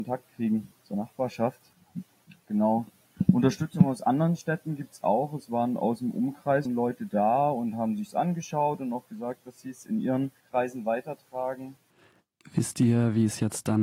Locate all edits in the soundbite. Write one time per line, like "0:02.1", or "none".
0:06.6
0:10.4

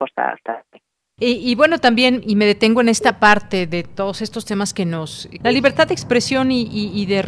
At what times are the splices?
0:01.2
0:05.4

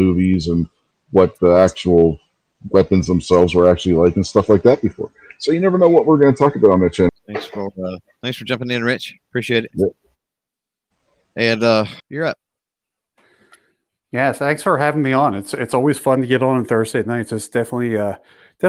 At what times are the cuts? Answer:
0:07.1
0:12.0

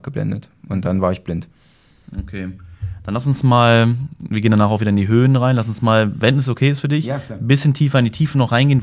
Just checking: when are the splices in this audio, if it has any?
none

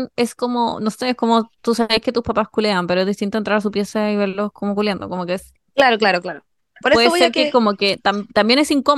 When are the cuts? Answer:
none

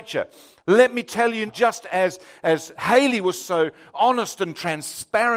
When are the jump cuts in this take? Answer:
0:01.5

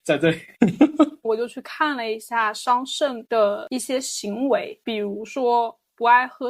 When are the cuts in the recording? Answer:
0:01.2

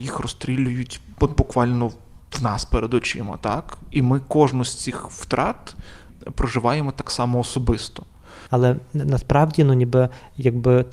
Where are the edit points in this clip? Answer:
0:08.5

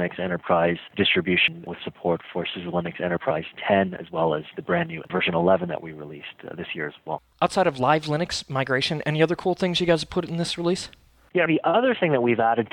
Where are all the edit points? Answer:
0:11.5

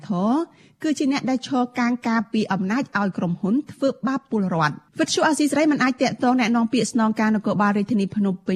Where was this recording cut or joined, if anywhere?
0:04.9

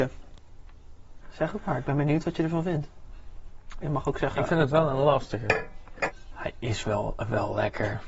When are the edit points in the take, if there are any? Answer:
0:03.8

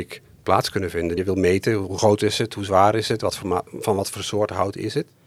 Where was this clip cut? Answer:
0:01.2

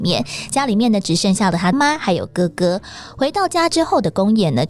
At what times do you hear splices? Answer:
0:01.7

